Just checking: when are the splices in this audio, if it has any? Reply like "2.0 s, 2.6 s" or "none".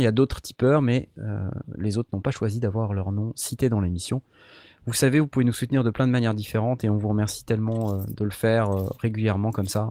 none